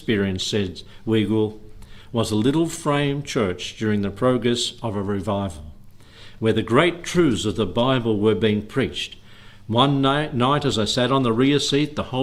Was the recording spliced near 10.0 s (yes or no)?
no